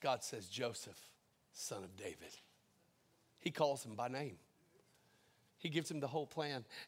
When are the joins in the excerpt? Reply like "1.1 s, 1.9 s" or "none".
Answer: 5.5 s

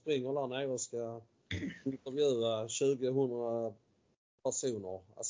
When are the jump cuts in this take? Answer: none

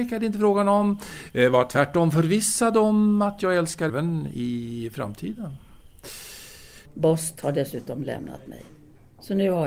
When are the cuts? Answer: 3.9 s, 6.8 s

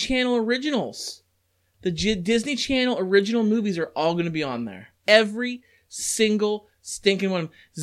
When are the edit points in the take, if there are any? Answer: 5.0 s

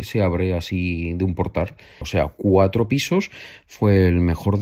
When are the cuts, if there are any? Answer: 2.0 s

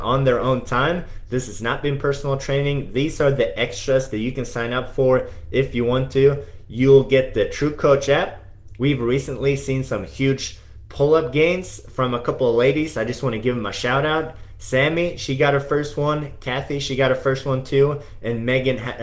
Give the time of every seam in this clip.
8.8 s

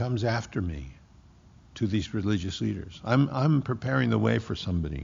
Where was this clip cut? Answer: none

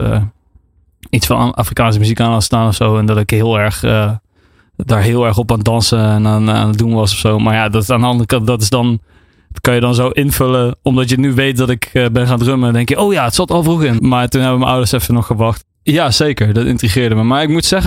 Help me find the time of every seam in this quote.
14.0 s, 15.6 s

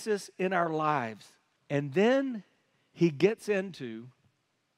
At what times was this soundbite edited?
1.6 s

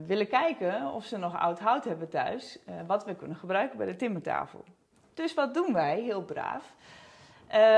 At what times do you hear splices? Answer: none

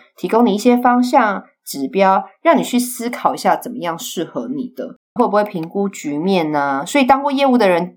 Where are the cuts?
5.2 s

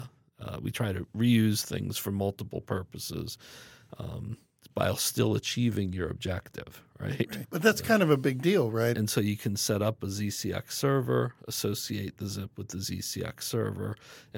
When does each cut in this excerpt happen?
7.4 s, 8.9 s

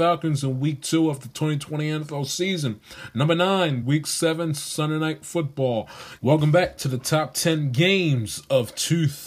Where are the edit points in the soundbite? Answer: 3.8 s, 6.2 s

